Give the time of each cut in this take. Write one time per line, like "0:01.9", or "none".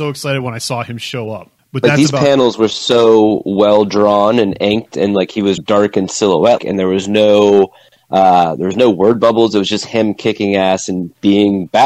0:05.6
0:06.6

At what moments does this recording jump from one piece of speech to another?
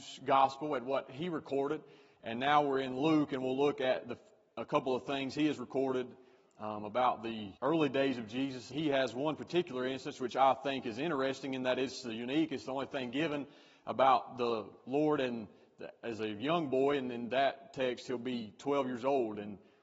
0:07.6
0:08.7

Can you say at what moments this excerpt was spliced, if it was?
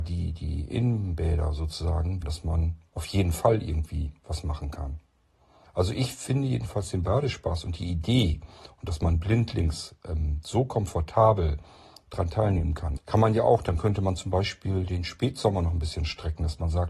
0:02.2
0:05.6
0:13.0

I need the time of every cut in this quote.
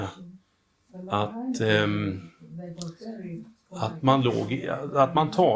none

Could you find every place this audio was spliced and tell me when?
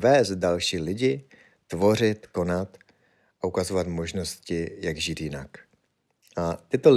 none

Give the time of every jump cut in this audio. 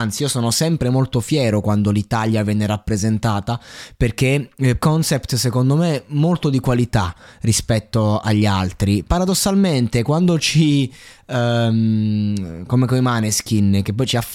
0:04.8

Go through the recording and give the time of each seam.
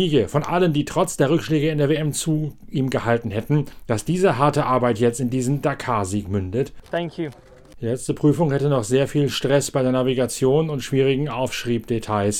0:06.8

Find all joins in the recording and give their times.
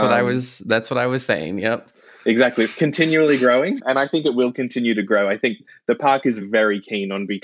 none

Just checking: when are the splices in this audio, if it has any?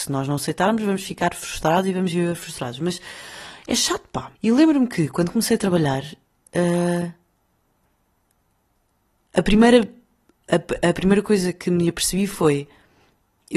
0:04.4

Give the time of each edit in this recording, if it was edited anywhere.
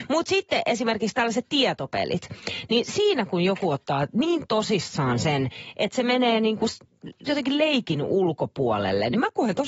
none

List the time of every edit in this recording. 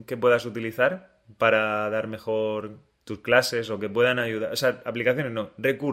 none

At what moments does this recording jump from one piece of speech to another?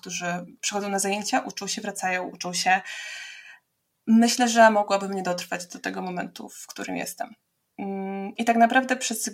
0:08.4

